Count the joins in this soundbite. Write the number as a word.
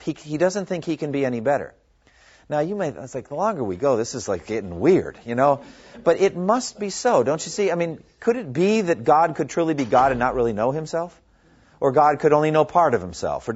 zero